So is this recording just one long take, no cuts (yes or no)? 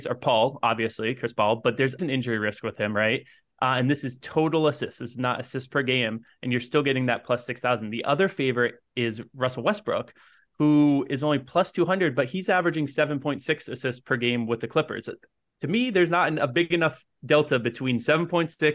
no